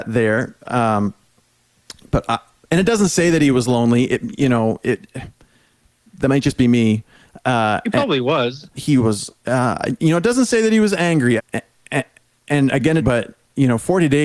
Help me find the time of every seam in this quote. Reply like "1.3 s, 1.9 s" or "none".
8.7 s, 11.4 s, 13.0 s